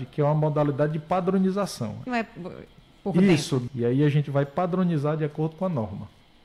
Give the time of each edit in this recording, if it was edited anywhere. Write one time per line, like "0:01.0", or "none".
0:02.1
0:03.7